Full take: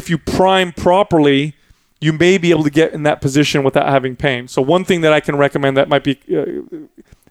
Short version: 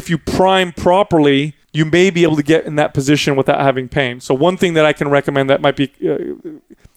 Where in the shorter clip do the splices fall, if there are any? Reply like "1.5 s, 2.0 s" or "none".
1.6 s